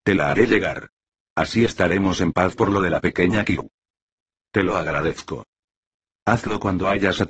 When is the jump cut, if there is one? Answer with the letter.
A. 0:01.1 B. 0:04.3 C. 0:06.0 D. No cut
D